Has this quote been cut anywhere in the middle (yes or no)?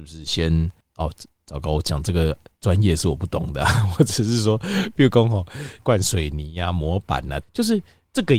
yes